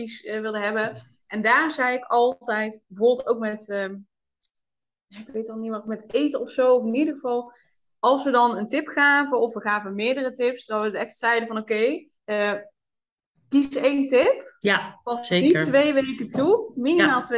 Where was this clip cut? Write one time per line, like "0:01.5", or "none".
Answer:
0:12.2

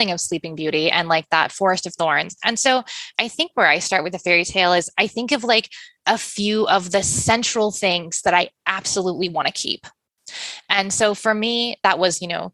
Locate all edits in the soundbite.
none

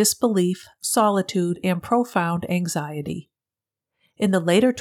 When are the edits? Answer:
none

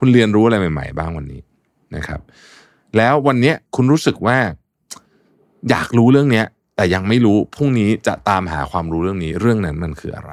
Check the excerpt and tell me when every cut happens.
0:03.7

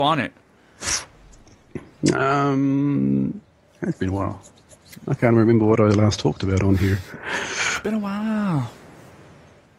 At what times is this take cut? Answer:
none

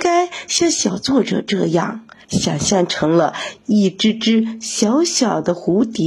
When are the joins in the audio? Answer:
0:02.2

